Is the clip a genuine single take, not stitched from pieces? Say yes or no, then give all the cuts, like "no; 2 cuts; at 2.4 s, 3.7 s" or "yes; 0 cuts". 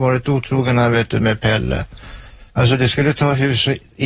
no; 1 cut; at 2.5 s